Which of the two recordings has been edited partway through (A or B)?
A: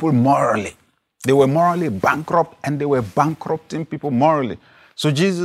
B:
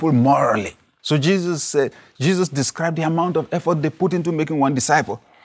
B